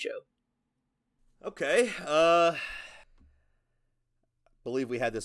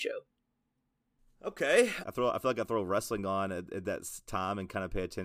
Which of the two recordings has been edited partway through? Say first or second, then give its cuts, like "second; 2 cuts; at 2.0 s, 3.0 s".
second; 1 cut; at 2.0 s